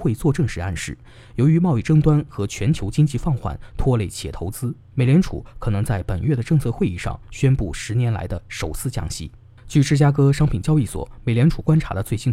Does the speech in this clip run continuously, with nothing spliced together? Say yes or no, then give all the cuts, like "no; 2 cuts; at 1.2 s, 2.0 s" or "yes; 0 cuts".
yes; 0 cuts